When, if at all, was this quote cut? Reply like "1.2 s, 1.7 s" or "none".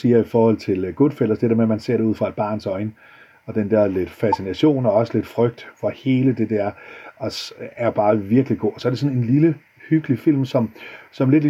none